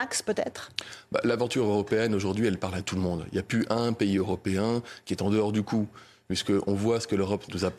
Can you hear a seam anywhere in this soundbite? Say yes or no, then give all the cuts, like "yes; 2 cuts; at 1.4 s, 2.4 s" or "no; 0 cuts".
no; 0 cuts